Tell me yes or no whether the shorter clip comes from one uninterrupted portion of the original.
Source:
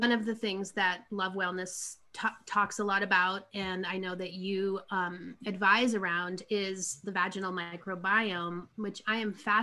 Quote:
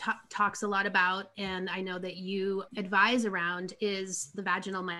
no